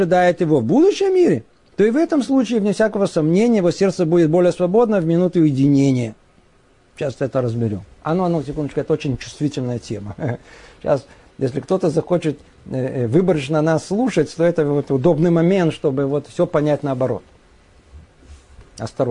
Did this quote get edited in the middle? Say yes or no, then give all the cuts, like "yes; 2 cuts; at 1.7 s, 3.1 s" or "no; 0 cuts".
no; 0 cuts